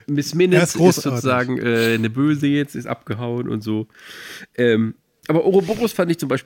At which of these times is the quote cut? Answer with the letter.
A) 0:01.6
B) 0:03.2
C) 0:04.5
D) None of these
D